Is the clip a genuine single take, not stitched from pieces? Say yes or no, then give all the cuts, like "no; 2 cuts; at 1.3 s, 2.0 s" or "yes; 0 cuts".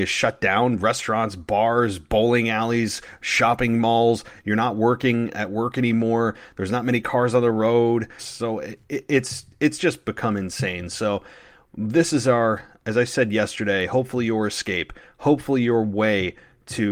no; 1 cut; at 8.2 s